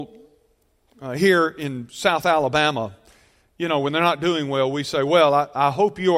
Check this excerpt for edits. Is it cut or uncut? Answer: uncut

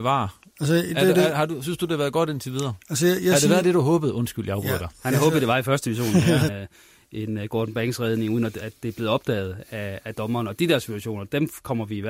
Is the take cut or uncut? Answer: cut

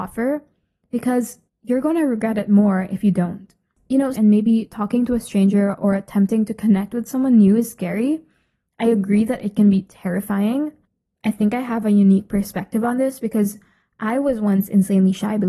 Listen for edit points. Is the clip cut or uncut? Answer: cut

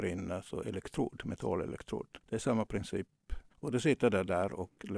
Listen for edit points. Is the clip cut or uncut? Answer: cut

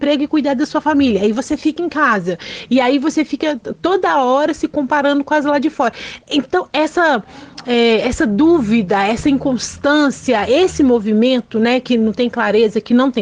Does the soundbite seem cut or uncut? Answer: uncut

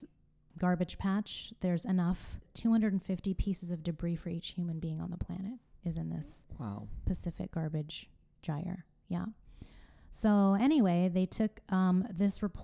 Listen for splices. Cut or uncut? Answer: uncut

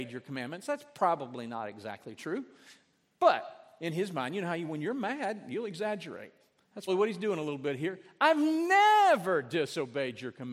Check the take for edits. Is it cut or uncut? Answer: cut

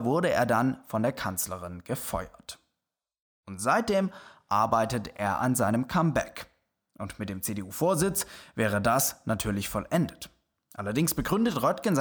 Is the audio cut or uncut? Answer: uncut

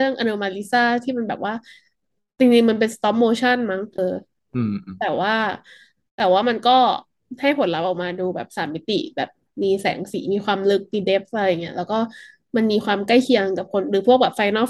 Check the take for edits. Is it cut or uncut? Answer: cut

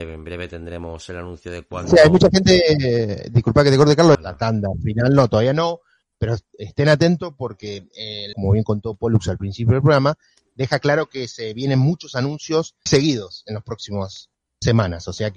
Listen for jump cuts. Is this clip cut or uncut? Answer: cut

